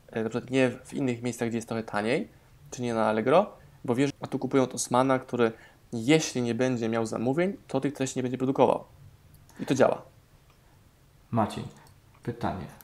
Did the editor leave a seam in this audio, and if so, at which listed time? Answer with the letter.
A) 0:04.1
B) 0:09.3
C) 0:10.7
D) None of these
A